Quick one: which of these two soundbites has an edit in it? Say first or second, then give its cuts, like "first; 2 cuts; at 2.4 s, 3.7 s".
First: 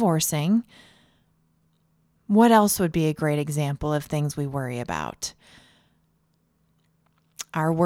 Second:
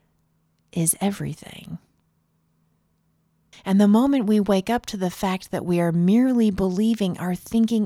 second; 1 cut; at 3.5 s